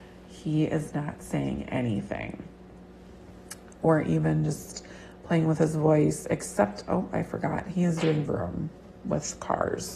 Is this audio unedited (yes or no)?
no